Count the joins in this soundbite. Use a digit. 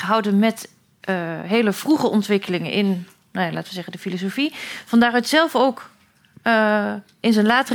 0